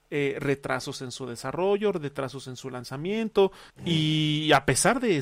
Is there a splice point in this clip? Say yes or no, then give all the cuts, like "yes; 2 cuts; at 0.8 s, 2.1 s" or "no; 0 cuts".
yes; 1 cut; at 3.7 s